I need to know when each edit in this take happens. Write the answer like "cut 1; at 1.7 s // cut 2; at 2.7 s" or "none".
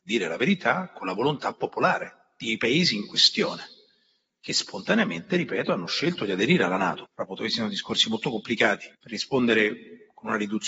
cut 1; at 7.1 s // cut 2; at 8.9 s